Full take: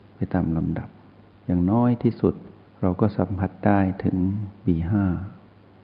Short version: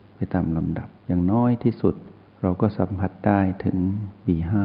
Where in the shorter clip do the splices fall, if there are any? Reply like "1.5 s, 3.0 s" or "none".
1.0 s